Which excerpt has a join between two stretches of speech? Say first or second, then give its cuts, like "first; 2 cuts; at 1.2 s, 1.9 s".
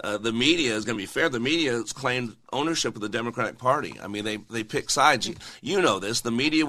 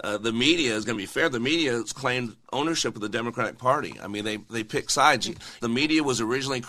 second; 1 cut; at 5.6 s